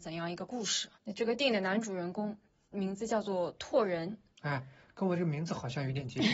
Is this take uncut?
no; 2 cuts; at 0.9 s, 4.3 s

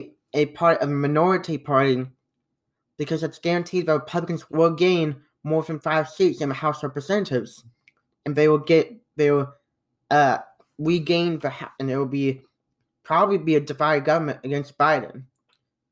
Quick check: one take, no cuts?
no; 2 cuts; at 4.5 s, 11.7 s

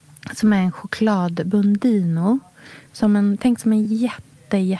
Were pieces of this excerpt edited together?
no; 0 cuts

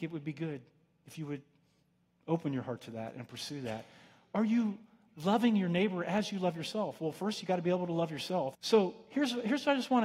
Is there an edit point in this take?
yes; 1 cut; at 8.5 s

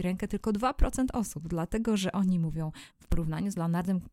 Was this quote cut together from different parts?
yes; 1 cut; at 2.9 s

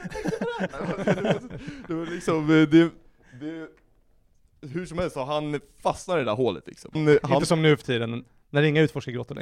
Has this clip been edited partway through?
yes; 1 cut; at 7.0 s

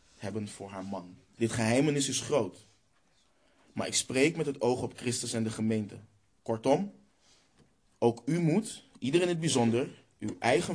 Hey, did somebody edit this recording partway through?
yes; 1 cut; at 1.3 s

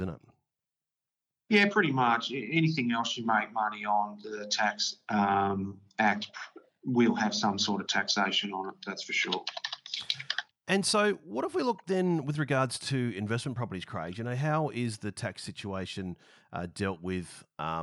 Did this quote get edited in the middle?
no; 0 cuts

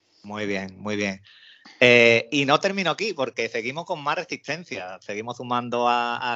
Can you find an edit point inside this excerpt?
no; 0 cuts

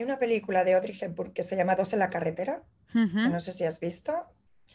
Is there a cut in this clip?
no; 0 cuts

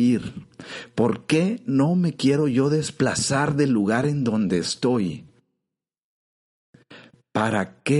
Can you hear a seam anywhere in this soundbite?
no; 0 cuts

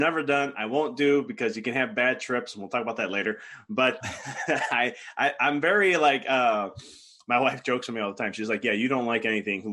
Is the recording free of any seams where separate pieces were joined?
no; 1 cut; at 4.0 s

